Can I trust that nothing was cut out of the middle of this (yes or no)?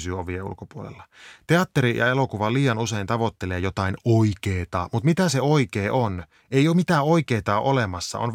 yes